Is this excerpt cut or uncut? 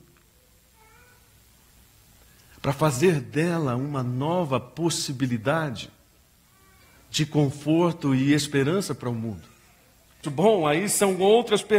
cut